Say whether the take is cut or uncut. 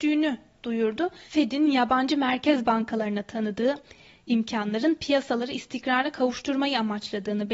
cut